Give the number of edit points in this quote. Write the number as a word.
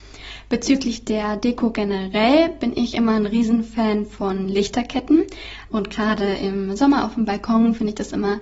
one